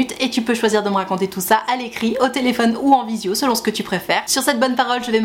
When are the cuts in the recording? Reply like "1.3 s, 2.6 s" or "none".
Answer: 4.3 s